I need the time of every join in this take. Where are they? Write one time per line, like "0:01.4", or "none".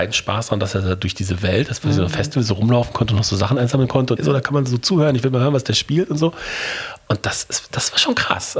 0:04.2

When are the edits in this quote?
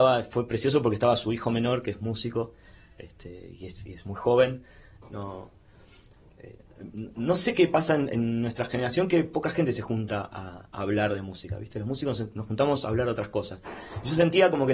0:05.0

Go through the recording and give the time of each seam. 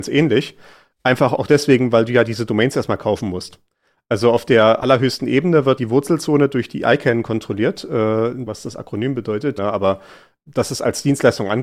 0:05.8
0:08.5
0:09.6

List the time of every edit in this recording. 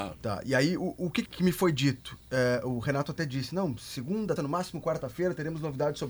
0:01.2
0:04.4

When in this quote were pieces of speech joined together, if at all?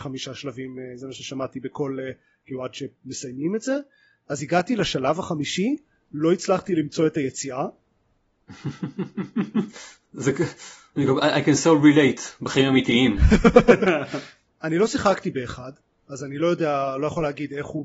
0:14.5

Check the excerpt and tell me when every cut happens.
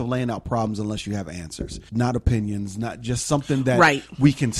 0:01.9

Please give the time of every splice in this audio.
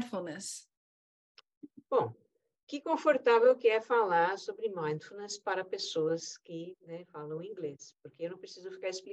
none

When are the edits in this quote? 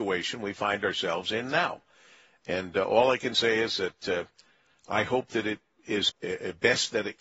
0:06.1

